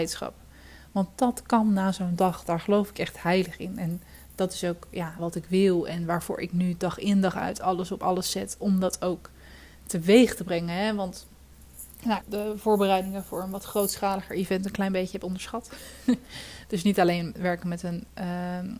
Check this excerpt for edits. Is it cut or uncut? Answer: cut